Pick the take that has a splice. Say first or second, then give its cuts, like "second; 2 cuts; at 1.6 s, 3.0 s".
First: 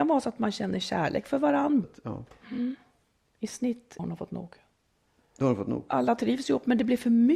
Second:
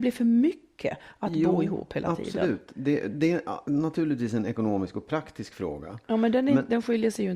first; 3 cuts; at 1.8 s, 4.0 s, 5.9 s